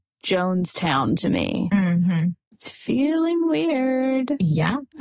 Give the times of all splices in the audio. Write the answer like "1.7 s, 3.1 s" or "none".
none